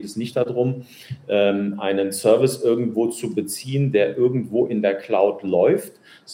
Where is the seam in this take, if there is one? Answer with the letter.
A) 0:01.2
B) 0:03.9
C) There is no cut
C